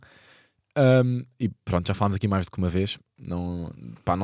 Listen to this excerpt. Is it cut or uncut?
cut